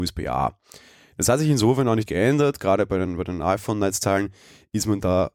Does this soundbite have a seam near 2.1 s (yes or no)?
yes